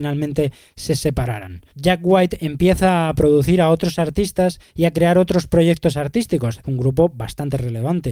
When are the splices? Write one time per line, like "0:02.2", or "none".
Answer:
0:01.7
0:06.6